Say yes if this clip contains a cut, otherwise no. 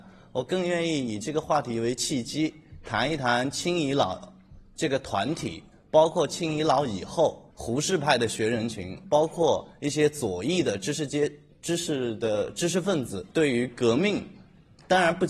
yes